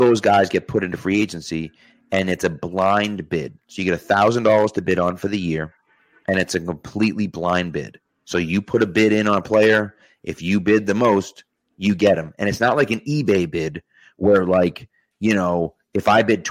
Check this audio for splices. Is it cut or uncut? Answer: uncut